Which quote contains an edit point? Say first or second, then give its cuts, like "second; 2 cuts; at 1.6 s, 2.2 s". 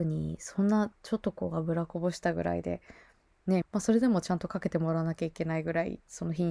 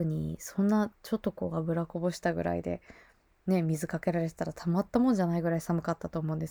first; 1 cut; at 3.6 s